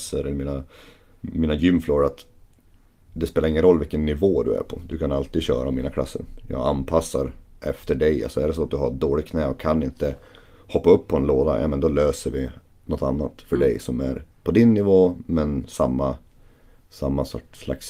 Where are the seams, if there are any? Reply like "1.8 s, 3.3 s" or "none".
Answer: 14.3 s